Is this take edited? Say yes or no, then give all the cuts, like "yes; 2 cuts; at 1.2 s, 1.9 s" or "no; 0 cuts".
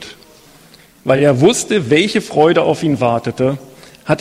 no; 0 cuts